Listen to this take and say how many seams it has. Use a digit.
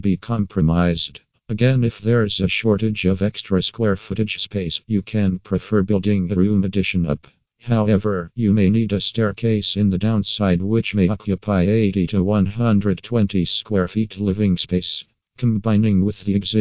0